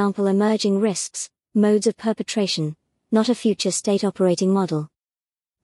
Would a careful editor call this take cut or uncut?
cut